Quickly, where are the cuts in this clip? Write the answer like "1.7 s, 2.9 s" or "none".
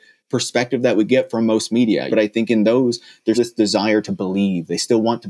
2.1 s, 3.3 s